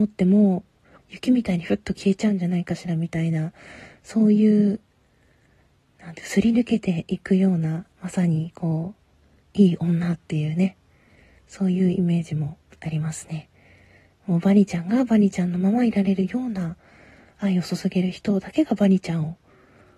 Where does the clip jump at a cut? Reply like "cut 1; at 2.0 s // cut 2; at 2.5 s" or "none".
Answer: cut 1; at 1.0 s // cut 2; at 7.9 s

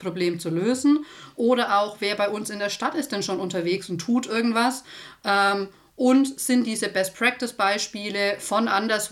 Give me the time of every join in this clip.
none

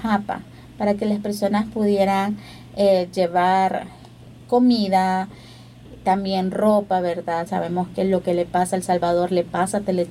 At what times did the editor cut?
cut 1; at 7.5 s

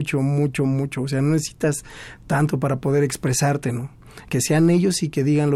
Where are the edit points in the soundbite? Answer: cut 1; at 4.2 s

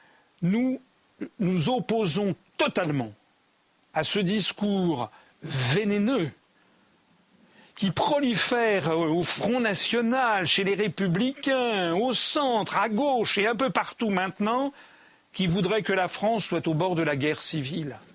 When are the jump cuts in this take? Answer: none

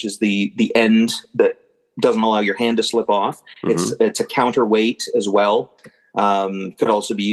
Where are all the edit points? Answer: none

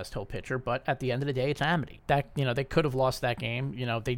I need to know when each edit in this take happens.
cut 1; at 2.0 s

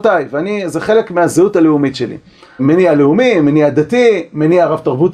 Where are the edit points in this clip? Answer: cut 1; at 2.6 s

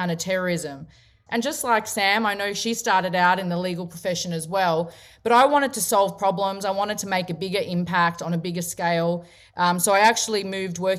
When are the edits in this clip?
cut 1; at 1.3 s

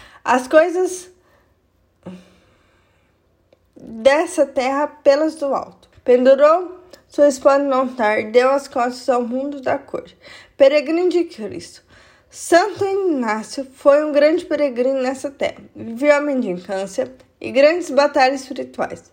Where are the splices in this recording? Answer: cut 1; at 5.9 s

